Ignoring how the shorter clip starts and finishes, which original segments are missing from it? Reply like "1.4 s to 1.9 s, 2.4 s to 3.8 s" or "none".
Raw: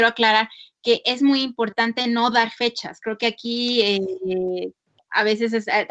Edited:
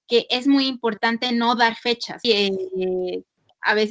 3.0 s to 3.7 s